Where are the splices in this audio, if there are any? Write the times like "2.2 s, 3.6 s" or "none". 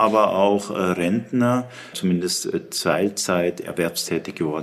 1.9 s